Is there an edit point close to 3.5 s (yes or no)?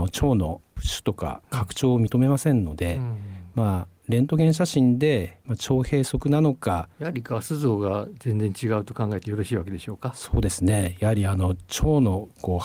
no